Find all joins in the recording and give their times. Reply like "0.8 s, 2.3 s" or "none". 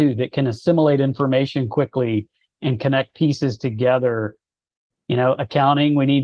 4.9 s